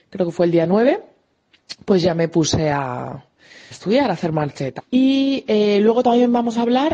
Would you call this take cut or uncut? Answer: cut